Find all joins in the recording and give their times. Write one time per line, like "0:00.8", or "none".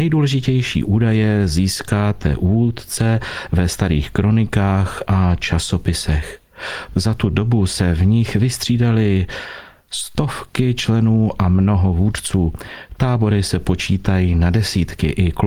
0:06.9